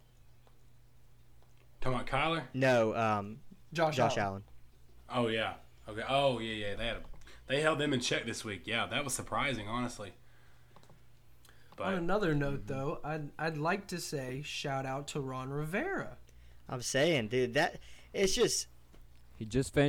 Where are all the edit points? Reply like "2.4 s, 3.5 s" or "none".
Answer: 6.8 s